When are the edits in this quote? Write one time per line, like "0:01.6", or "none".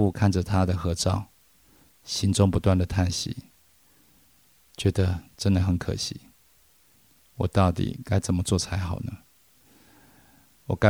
none